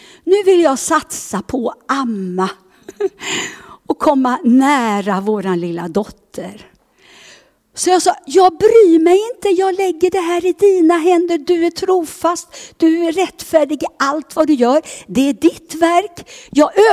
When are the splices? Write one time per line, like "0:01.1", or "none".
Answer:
none